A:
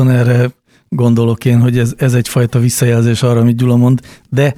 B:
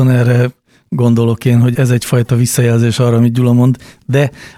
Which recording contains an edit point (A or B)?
B